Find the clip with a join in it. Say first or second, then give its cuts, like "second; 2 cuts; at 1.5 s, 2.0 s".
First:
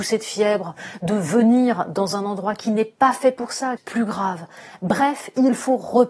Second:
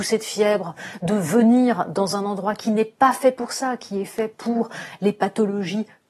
first; 1 cut; at 3.8 s